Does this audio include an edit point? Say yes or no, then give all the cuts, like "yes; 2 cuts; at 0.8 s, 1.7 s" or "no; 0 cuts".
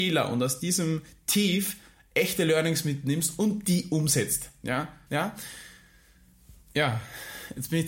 yes; 1 cut; at 5.1 s